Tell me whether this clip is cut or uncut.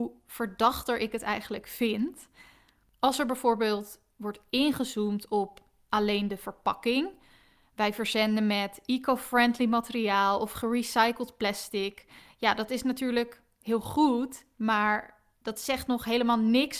uncut